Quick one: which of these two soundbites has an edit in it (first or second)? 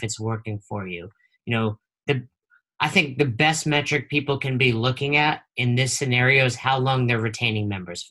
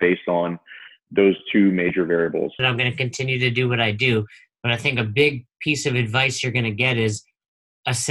second